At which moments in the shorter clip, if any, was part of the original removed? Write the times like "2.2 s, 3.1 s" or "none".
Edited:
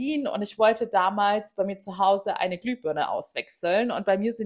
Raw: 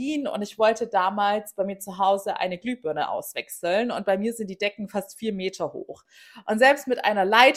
none